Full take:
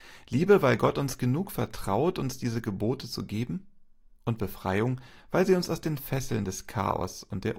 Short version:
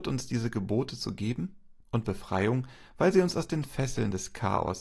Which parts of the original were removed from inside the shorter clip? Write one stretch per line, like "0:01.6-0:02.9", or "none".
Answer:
0:03.9-0:04.1